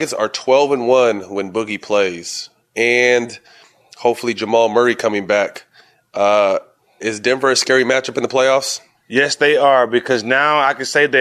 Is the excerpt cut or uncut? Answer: cut